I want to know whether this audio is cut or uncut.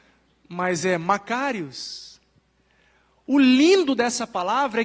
uncut